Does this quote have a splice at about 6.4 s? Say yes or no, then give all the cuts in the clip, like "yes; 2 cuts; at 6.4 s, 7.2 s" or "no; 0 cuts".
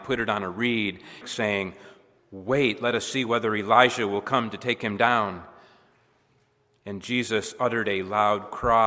no; 1 cut; at 1.2 s